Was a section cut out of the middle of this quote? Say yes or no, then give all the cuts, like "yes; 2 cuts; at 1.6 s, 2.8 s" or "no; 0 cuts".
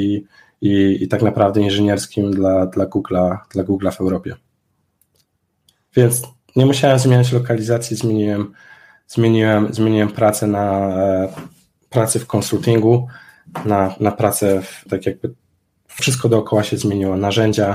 yes; 2 cuts; at 14.9 s, 16.0 s